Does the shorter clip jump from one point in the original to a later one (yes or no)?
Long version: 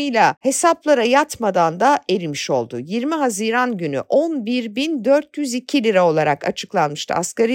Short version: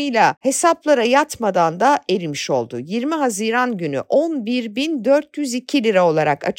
no